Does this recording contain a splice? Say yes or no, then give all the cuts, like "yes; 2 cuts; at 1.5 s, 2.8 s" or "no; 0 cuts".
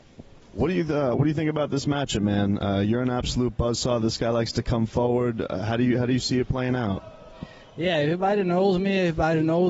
no; 0 cuts